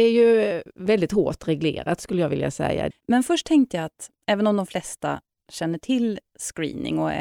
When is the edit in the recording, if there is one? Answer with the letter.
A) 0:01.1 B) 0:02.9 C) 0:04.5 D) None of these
B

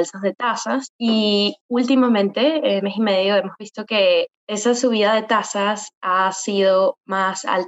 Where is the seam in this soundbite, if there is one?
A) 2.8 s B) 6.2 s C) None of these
A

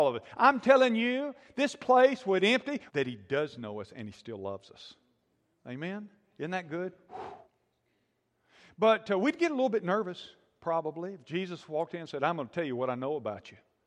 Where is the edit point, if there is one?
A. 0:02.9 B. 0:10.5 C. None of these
A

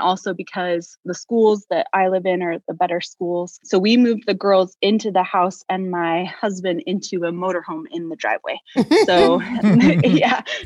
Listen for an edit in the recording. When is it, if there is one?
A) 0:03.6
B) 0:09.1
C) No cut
C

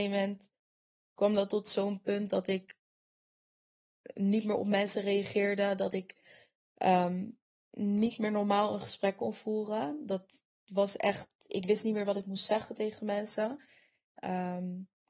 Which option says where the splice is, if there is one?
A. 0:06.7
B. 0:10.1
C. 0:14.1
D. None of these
C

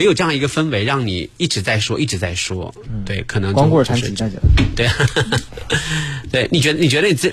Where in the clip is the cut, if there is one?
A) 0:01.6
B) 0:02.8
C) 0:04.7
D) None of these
D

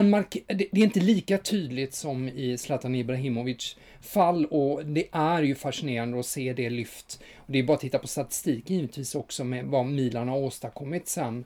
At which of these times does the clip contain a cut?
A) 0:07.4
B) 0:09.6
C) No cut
B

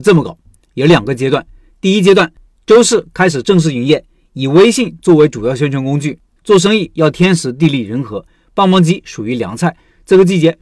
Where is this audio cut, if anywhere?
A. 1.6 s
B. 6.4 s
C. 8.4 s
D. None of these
B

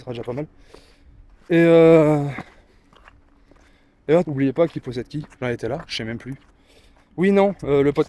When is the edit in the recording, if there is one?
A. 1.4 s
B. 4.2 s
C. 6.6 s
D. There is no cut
B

